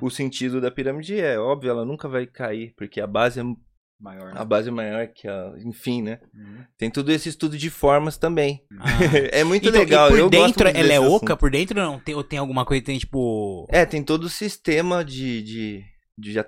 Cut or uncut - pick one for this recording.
cut